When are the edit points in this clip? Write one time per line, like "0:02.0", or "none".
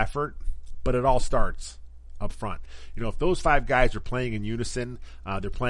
none